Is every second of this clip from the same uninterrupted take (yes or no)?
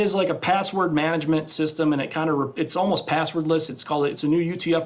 yes